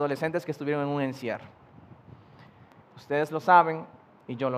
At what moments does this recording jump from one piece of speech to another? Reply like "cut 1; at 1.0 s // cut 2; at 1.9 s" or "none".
cut 1; at 2.8 s